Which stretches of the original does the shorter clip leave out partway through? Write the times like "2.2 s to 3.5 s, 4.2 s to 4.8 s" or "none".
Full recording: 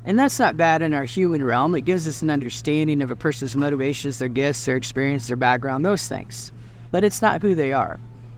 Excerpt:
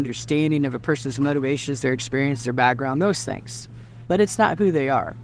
4.2 s to 4.6 s